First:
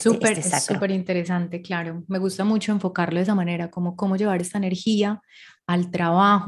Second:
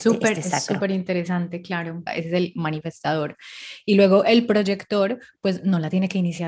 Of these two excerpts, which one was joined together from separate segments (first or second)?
second